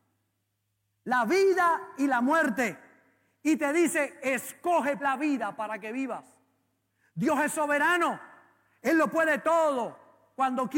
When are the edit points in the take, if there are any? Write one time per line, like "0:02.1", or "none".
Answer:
0:05.0